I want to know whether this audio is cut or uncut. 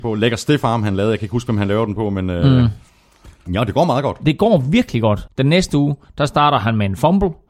cut